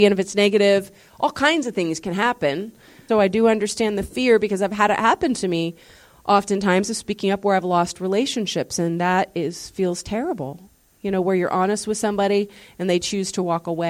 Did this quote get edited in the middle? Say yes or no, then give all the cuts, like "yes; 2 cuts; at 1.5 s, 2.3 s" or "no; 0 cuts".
yes; 1 cut; at 3.1 s